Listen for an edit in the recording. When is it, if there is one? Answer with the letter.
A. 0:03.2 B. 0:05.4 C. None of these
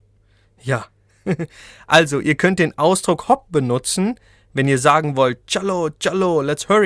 A